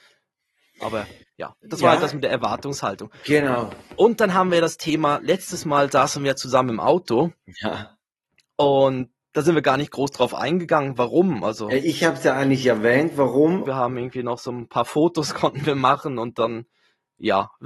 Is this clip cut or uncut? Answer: cut